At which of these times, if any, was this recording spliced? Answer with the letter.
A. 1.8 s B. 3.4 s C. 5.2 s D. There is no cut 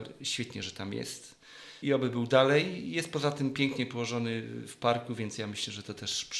A